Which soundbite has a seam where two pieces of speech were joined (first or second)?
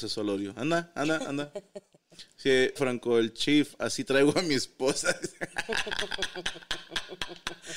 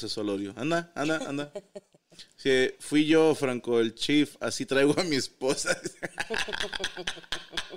first